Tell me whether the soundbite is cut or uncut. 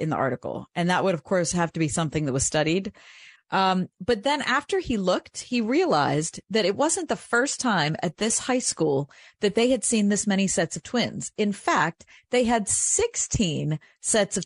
cut